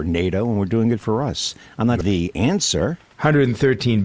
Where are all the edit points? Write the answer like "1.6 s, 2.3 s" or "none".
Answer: 2.0 s